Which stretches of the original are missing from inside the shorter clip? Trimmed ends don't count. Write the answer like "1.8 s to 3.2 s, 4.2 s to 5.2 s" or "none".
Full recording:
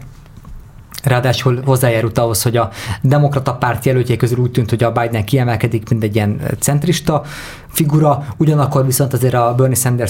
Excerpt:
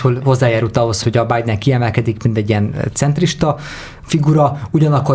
2.4 s to 4.7 s

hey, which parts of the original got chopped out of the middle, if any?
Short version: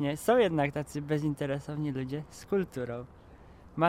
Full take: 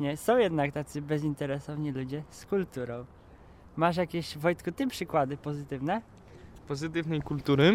none

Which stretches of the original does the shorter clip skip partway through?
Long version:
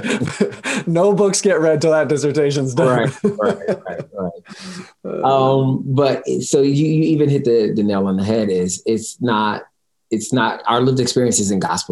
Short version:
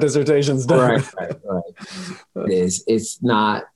3.2 s to 3.8 s, 5.2 s to 8.5 s

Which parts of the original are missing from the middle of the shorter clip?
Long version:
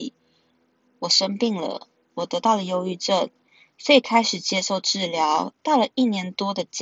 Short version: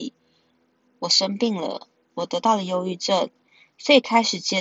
none

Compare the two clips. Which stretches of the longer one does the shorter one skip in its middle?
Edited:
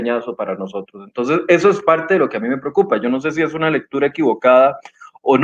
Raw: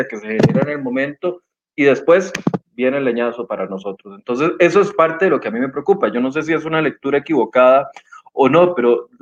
none

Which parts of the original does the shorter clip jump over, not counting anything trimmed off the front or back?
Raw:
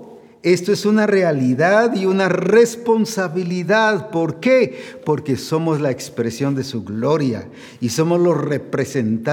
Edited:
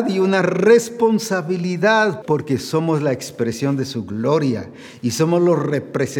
4.1 s to 5.0 s

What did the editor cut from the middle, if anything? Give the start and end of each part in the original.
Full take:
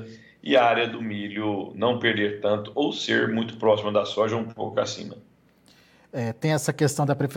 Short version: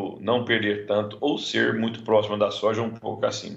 none

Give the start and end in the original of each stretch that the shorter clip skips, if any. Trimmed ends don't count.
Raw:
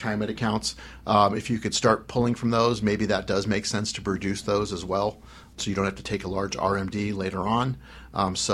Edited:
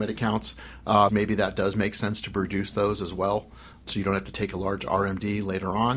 1.3 s to 2.8 s

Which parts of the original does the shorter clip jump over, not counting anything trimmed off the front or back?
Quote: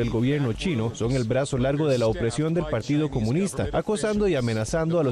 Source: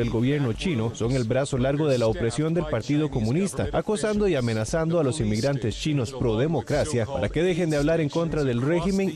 none

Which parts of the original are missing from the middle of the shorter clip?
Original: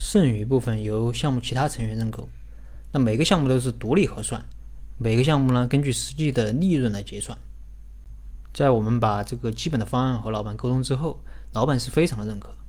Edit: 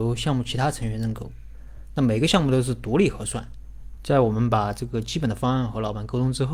4.9 s to 8.5 s

